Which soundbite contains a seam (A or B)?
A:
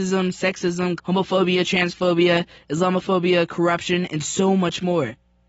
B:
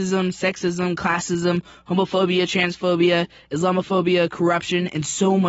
A